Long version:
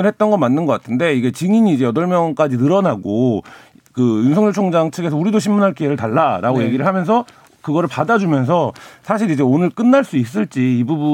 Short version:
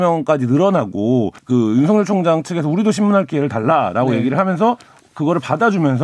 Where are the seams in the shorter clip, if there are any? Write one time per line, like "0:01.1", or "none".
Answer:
0:01.4